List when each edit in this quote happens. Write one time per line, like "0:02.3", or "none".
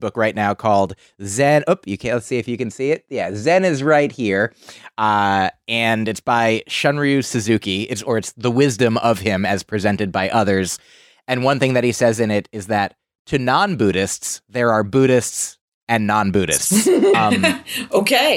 0:17.1